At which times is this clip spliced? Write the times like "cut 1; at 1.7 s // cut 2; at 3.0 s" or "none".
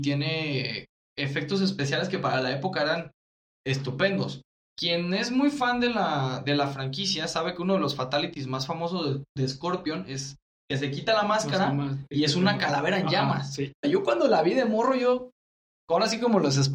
cut 1; at 13.8 s